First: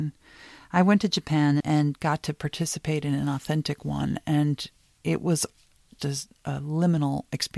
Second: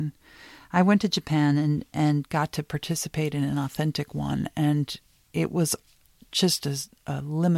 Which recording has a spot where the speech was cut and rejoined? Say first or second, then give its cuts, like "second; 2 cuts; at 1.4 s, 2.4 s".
first; 2 cuts; at 1.6 s, 6.0 s